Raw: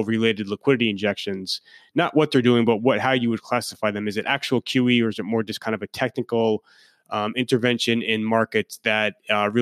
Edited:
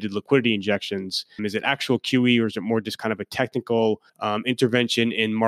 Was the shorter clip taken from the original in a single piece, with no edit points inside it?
no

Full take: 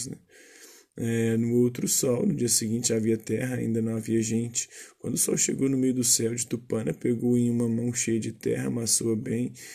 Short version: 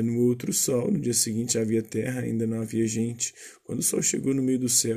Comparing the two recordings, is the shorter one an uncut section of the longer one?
yes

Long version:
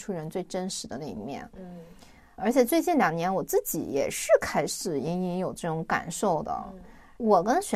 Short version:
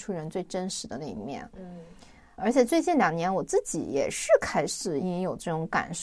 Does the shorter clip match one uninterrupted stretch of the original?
no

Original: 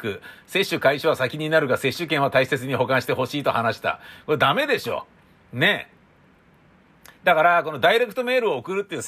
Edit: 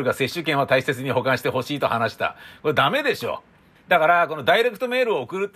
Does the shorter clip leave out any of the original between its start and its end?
yes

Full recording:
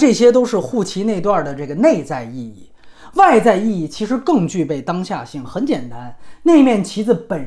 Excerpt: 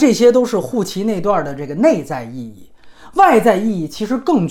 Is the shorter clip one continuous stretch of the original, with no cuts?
yes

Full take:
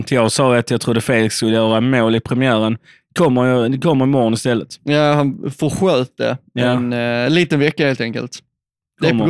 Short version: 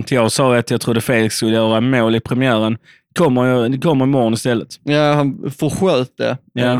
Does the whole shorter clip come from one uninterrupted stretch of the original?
yes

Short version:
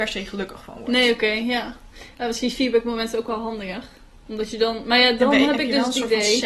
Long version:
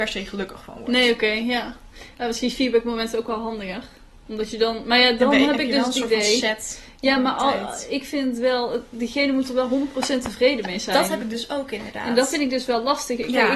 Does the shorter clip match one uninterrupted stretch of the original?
yes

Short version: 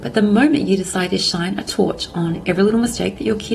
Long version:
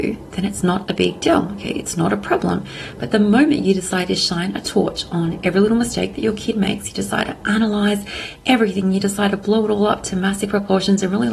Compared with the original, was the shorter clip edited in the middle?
no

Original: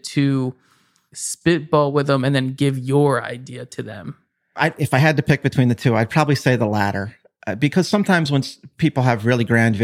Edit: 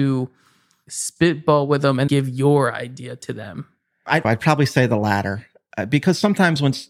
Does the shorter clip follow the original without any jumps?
no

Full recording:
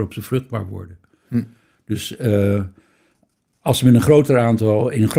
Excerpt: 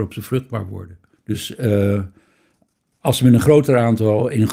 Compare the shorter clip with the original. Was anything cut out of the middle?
yes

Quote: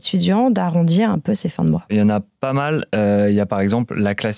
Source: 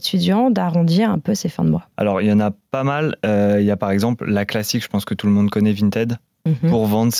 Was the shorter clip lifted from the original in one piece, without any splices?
no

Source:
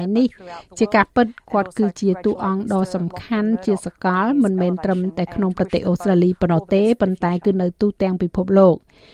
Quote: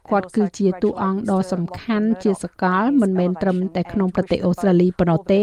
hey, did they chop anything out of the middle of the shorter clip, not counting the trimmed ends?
no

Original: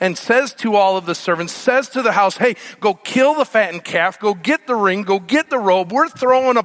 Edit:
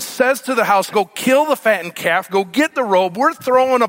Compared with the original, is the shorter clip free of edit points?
no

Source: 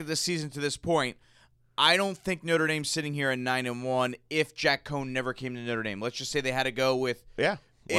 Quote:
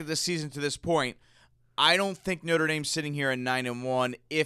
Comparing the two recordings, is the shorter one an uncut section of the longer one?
yes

